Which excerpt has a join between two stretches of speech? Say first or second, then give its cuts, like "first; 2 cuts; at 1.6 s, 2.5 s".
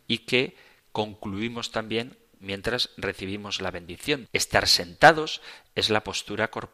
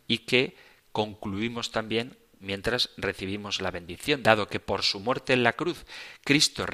first; 1 cut; at 4.2 s